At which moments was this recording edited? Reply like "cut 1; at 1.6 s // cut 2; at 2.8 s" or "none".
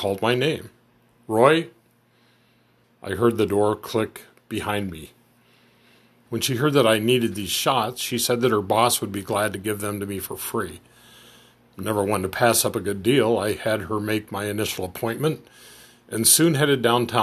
cut 1; at 2.8 s // cut 2; at 6.3 s